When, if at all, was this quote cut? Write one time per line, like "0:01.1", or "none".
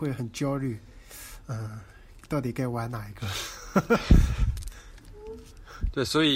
none

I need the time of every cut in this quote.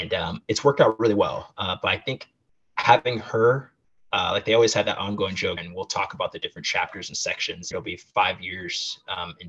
0:05.6
0:07.7

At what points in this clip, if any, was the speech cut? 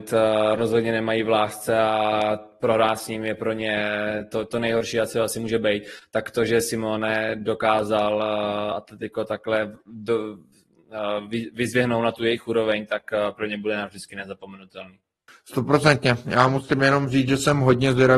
none

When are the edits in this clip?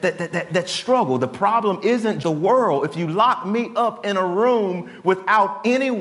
0:02.2

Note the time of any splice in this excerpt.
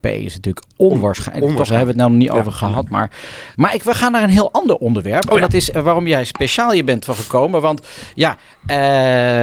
0:03.5

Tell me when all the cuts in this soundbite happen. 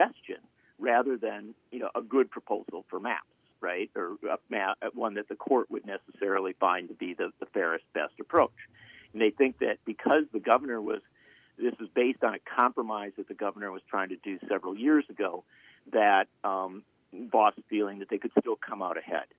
none

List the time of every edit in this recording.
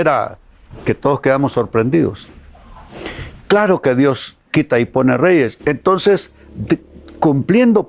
0:05.6

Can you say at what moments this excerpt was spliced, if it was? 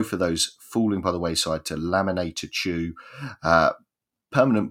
none

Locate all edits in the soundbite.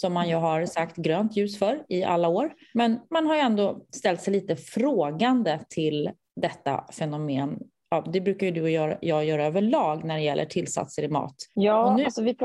0:11.6

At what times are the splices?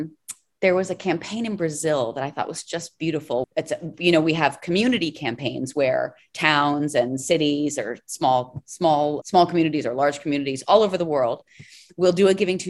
0:03.4
0:09.2

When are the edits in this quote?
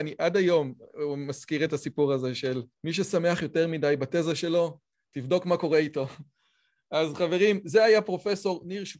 0:02.7

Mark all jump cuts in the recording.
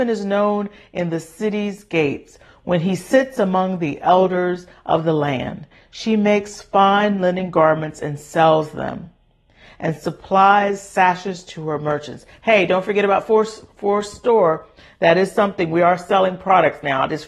none

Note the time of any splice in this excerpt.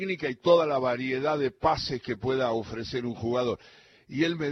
none

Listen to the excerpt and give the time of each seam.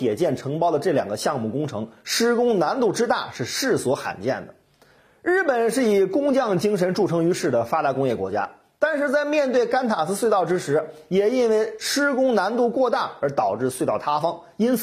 none

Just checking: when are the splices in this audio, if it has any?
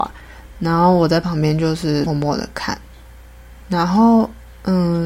0:02.1

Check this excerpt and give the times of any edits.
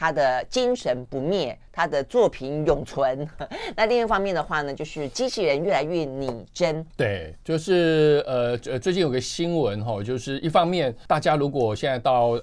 0:06.9

